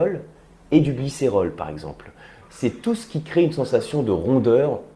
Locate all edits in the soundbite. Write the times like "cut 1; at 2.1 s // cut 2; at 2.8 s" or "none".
cut 1; at 2.4 s